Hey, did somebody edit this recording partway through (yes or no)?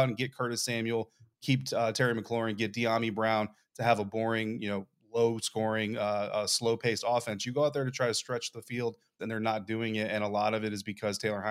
yes